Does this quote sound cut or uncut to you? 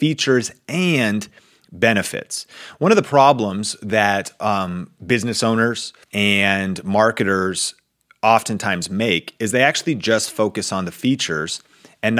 cut